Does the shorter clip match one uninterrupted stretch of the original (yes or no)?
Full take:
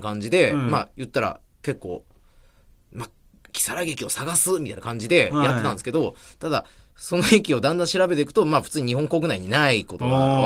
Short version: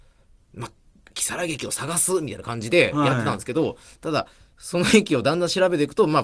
yes